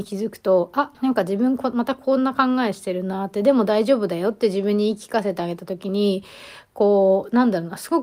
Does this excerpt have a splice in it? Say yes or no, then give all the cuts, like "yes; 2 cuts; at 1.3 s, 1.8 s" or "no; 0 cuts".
yes; 1 cut; at 0.9 s